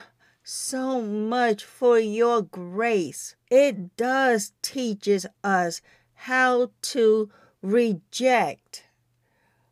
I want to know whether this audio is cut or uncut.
cut